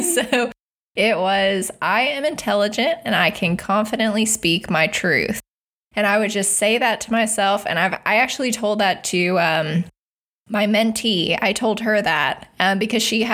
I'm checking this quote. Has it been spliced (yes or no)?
no